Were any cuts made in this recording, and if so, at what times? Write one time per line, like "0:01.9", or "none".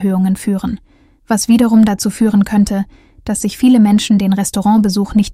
none